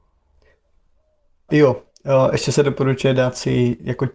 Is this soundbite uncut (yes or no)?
no